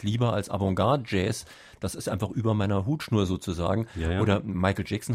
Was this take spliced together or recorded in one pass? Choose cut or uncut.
uncut